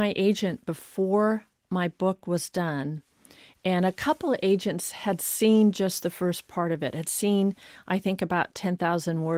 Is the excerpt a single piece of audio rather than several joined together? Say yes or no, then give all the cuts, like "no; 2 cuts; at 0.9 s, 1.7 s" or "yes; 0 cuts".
yes; 0 cuts